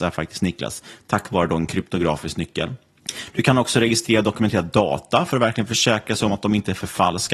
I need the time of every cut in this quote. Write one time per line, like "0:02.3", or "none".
none